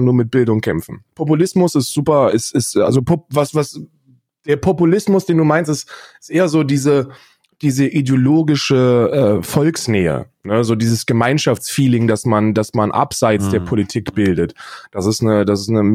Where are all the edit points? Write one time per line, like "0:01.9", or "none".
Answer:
0:01.1

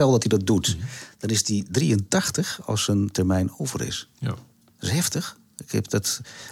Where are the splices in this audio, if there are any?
none

